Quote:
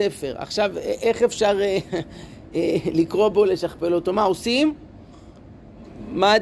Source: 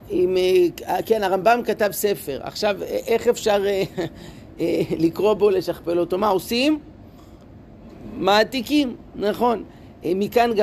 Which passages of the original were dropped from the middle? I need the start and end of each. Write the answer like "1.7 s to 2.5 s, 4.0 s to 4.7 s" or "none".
none